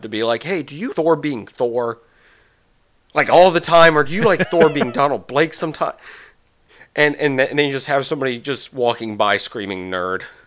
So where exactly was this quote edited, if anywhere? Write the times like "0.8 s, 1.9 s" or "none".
0.9 s

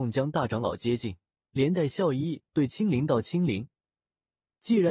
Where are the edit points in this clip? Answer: 1.5 s

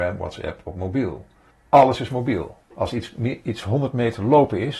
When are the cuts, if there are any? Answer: 1.5 s

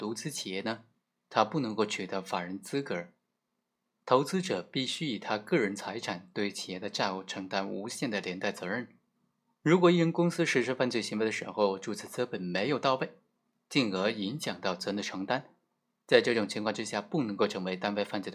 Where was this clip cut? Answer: 9.5 s

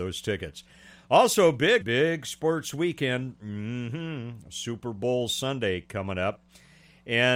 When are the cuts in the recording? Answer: 1.8 s

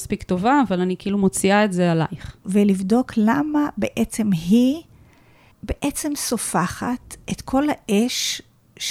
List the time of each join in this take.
2.4 s

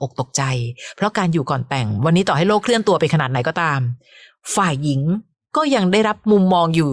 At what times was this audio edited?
none

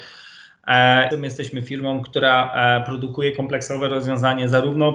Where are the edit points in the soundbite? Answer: 1.1 s

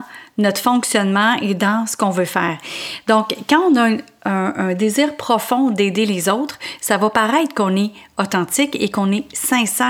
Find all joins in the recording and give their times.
none

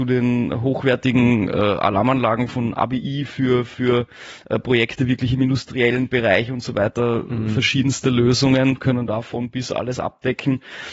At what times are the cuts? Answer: none

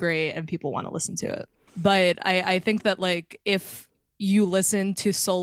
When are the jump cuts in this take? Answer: 1.7 s

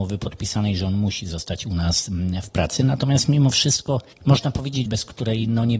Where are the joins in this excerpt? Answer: 4.9 s

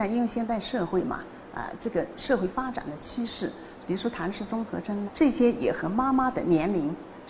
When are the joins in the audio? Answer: 3.8 s, 5.1 s

